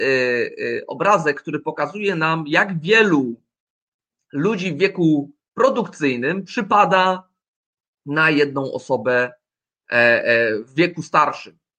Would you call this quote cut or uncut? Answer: uncut